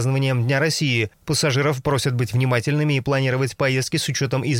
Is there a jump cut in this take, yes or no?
no